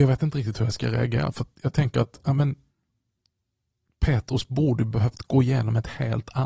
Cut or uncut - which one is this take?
uncut